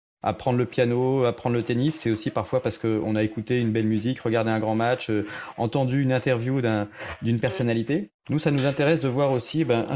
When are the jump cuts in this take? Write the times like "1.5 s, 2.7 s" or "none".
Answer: 8.2 s